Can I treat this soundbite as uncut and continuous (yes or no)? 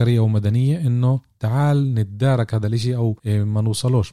no